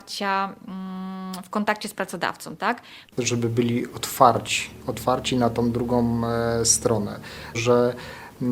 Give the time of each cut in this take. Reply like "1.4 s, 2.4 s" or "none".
3.1 s, 7.5 s